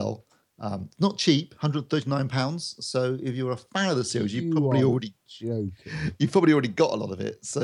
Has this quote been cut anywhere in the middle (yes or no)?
no